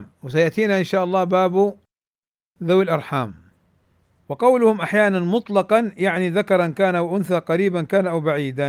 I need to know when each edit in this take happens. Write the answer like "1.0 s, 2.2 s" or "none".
none